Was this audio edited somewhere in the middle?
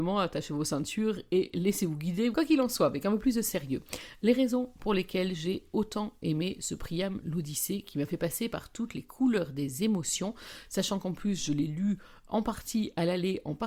yes; 1 cut; at 2.3 s

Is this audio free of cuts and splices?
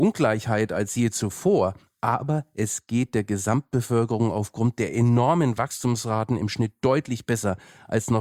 yes; 0 cuts

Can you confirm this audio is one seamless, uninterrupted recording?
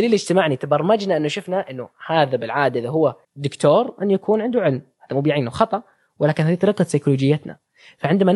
no; 1 cut; at 3.2 s

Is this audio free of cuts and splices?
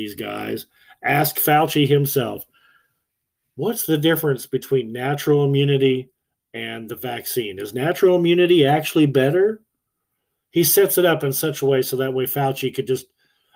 yes; 0 cuts

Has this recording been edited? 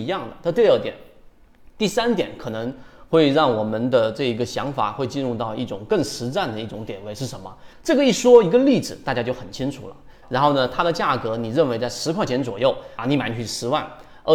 yes; 3 cuts; at 7.7 s, 10.2 s, 13.0 s

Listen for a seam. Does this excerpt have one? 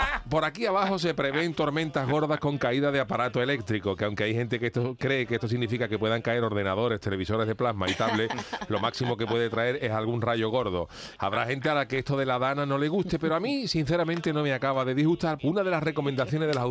yes; 2 cuts; at 11.2 s, 15.4 s

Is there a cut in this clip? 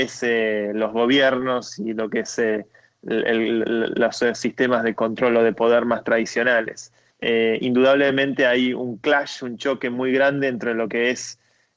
yes; 1 cut; at 7.1 s

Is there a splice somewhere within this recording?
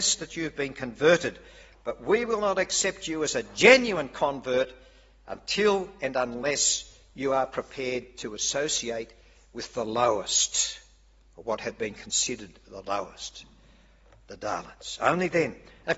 no; 0 cuts

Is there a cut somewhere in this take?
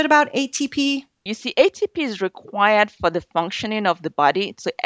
yes; 1 cut; at 1.3 s

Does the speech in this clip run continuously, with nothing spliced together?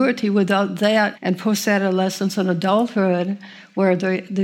no; 1 cut; at 1.1 s

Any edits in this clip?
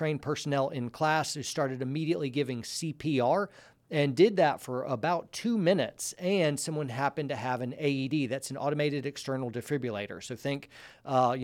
no; 0 cuts

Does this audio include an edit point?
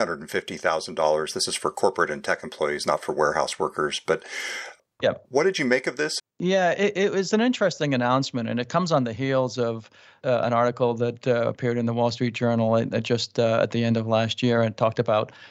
yes; 1 cut; at 6.2 s

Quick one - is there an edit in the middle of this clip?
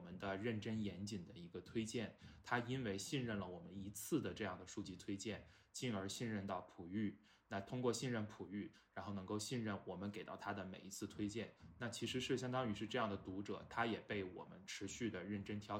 no; 0 cuts

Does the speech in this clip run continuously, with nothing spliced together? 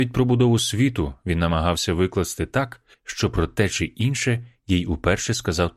no; 1 cut; at 2.9 s

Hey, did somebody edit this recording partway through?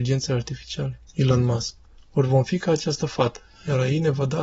yes; 1 cut; at 1.1 s

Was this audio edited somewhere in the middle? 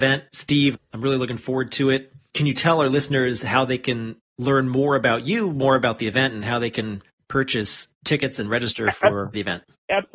no; 0 cuts

